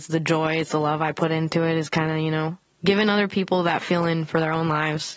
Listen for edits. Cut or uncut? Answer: uncut